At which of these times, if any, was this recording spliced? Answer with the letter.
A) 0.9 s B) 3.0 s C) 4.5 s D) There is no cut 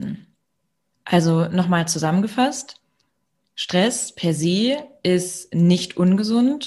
A